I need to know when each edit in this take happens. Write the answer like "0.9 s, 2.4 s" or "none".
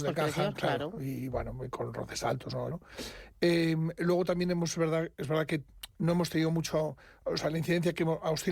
2.7 s